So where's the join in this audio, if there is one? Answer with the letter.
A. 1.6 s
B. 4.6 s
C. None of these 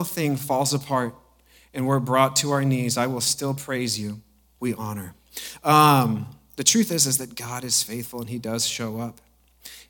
B